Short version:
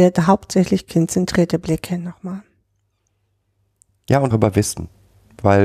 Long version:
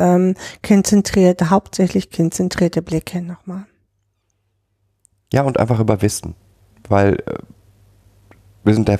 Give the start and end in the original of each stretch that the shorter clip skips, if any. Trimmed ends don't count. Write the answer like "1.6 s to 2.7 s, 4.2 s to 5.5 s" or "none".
5.5 s to 5.8 s